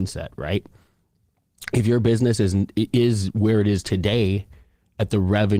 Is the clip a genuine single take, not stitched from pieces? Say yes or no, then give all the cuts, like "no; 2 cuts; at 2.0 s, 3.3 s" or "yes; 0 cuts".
yes; 0 cuts